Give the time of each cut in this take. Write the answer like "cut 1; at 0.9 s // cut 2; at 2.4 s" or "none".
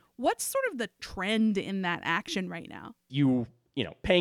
cut 1; at 3.1 s